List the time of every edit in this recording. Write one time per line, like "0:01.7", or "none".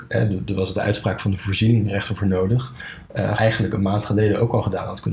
0:03.4